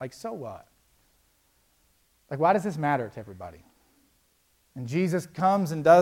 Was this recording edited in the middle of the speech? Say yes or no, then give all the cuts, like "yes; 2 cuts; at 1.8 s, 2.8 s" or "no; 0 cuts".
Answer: yes; 1 cut; at 4.6 s